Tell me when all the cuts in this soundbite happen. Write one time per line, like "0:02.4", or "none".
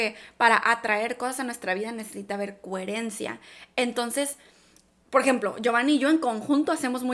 0:05.0